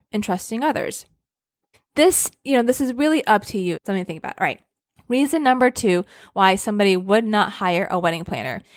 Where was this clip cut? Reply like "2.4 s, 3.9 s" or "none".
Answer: 1.7 s, 3.7 s